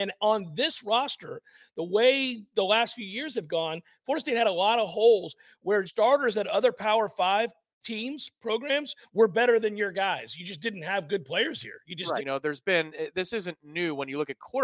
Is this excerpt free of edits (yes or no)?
no